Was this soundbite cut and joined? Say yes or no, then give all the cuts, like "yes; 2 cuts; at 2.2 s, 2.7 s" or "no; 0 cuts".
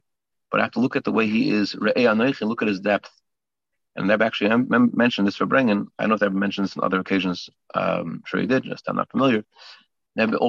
no; 0 cuts